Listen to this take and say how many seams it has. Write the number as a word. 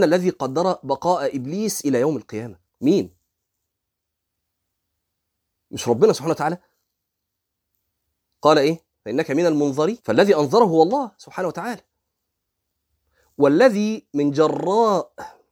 three